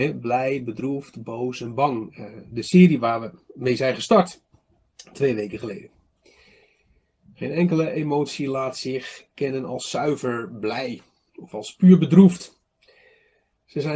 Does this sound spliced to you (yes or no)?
no